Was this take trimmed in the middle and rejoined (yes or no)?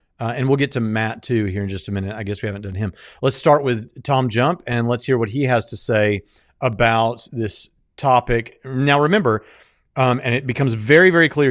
no